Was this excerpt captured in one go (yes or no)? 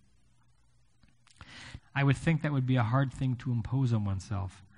no